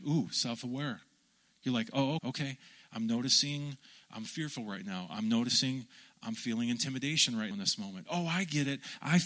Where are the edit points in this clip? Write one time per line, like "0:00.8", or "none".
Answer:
0:02.2
0:07.5

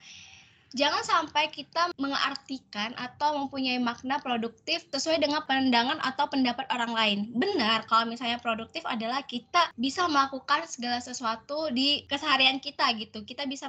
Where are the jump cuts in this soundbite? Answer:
none

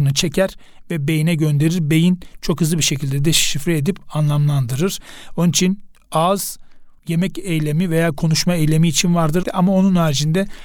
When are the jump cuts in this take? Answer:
0:07.0
0:09.4

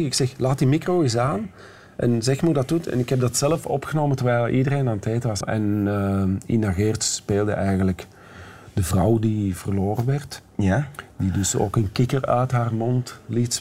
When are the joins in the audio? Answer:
0:05.4

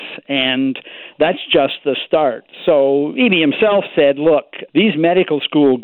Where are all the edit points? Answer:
0:04.7

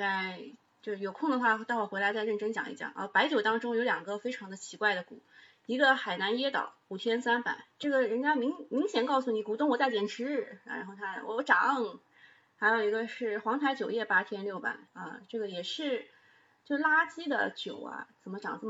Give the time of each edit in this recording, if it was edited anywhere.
0:14.9

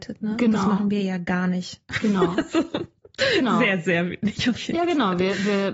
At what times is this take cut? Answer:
none

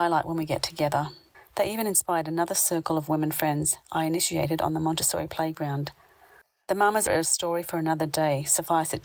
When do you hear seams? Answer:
none

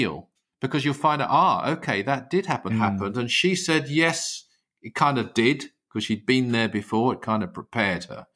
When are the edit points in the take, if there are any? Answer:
0:02.7

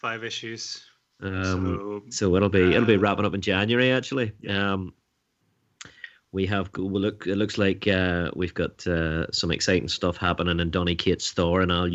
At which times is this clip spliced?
none

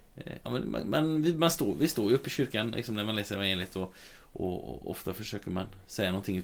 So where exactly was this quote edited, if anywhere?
none

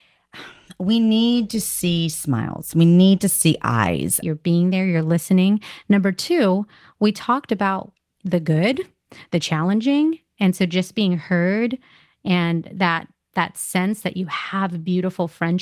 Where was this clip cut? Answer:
0:04.2

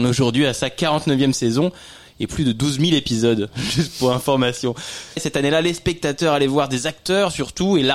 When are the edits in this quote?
0:05.2

